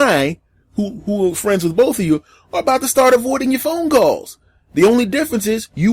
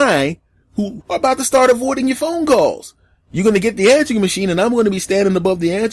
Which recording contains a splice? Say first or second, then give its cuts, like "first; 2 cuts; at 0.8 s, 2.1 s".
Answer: second; 2 cuts; at 1.0 s, 3.2 s